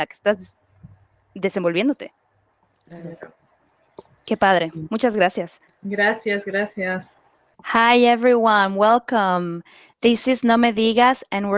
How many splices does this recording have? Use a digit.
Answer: 1